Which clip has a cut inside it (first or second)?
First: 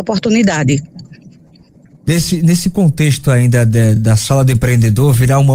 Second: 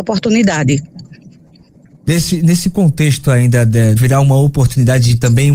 second